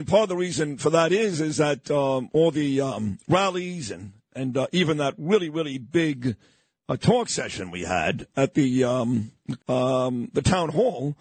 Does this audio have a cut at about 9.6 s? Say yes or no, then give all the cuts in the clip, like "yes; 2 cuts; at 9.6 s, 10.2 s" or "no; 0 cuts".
yes; 1 cut; at 9.6 s